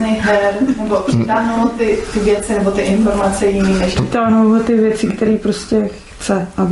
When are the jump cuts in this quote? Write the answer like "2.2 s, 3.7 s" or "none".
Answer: none